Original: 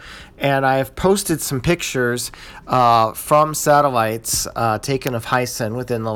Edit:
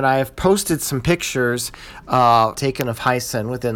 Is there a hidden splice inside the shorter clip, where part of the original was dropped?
yes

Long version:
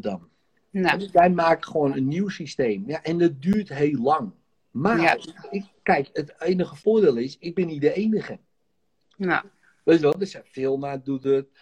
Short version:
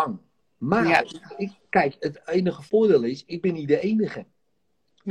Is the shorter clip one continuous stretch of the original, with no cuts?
yes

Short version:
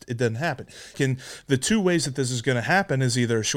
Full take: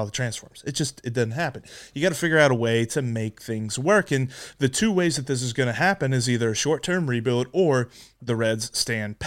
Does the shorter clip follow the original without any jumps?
no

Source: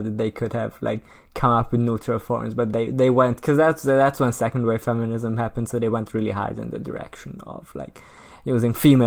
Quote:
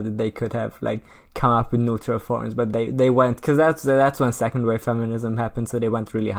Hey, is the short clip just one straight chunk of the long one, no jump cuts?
yes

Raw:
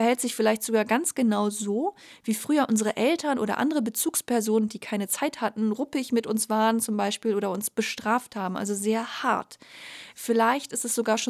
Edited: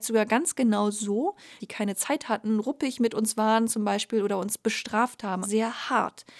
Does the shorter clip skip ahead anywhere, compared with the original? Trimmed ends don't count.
yes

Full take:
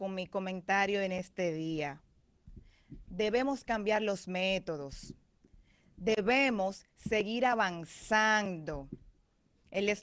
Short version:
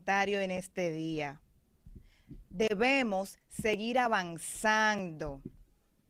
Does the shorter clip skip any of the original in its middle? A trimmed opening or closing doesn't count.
yes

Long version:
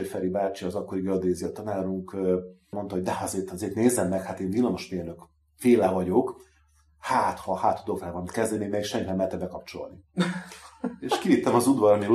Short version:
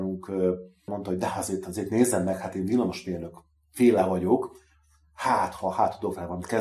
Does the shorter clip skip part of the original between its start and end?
no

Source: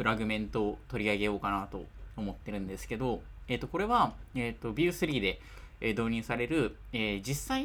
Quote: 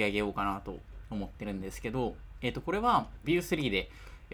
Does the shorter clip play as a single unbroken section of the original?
no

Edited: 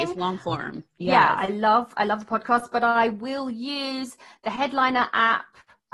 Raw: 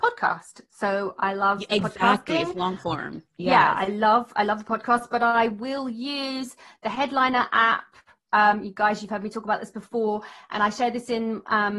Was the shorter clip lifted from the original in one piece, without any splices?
yes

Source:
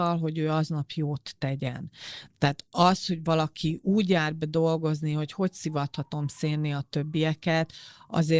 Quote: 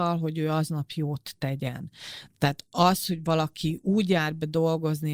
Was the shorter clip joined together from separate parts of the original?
no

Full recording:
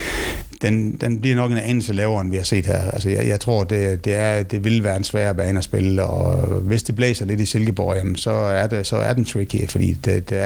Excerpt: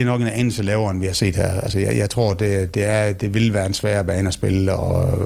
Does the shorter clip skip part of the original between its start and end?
no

